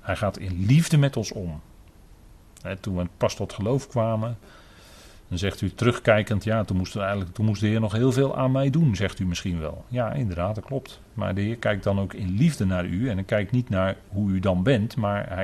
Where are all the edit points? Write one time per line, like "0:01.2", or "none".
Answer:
none